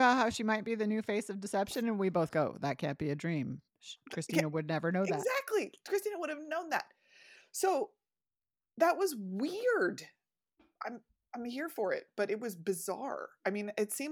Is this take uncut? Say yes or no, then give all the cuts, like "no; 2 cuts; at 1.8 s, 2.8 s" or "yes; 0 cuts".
yes; 0 cuts